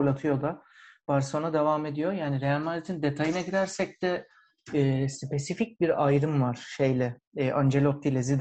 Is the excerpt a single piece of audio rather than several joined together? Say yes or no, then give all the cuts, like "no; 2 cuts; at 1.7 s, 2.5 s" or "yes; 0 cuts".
yes; 0 cuts